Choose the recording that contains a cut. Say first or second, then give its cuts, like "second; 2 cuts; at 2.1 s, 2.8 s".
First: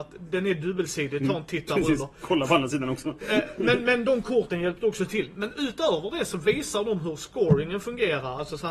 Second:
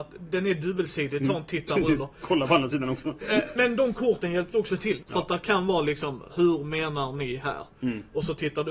second; 2 cuts; at 3.6 s, 5.0 s